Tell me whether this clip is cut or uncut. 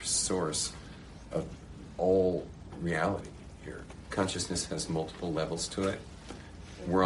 cut